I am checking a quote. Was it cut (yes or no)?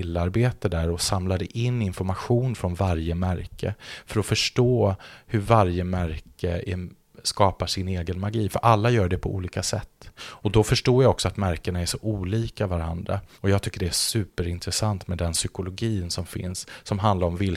yes